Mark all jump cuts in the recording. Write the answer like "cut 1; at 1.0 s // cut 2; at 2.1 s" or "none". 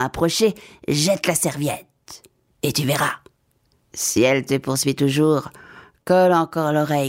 none